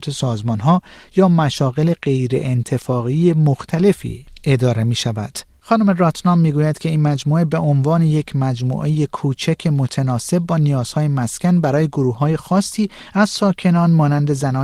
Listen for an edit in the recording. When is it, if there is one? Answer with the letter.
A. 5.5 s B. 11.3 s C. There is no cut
C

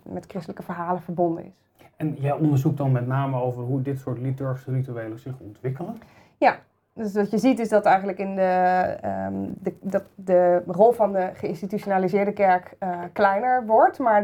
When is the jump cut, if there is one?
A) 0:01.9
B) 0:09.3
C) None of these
C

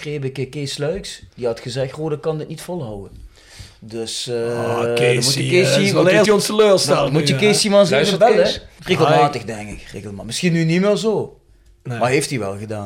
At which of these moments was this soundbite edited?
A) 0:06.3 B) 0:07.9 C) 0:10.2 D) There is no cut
A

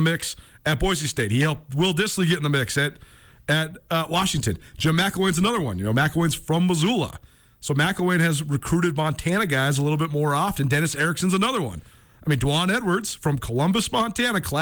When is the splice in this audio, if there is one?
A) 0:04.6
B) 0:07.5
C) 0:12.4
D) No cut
D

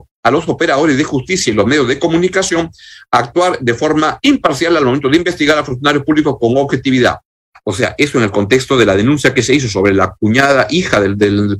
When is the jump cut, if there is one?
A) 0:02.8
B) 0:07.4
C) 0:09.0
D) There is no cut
D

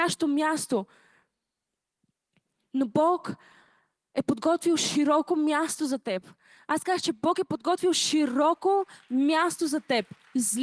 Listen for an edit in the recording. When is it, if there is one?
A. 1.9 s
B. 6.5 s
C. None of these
C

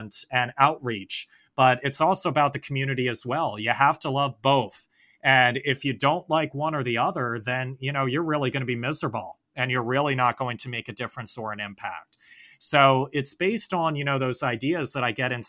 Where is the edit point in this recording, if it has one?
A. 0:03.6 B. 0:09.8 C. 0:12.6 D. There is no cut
D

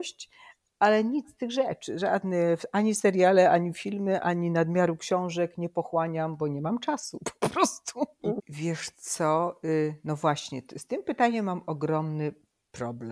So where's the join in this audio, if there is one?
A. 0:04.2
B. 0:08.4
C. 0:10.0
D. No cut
B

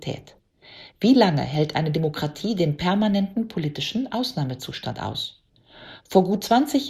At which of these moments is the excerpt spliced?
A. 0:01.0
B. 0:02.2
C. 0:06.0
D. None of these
D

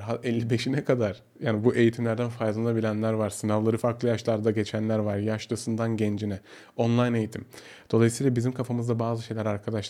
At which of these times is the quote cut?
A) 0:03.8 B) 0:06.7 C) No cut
A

